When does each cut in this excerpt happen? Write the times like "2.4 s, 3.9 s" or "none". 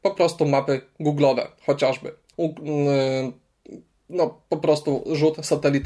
2.3 s